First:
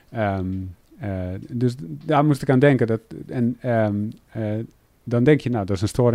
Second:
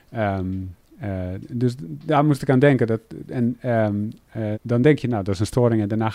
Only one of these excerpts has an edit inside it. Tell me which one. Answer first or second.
second